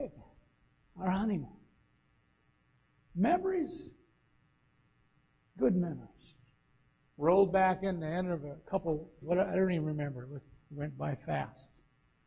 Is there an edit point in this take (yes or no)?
yes